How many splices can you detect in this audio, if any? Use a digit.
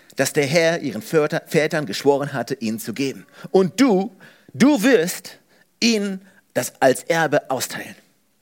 0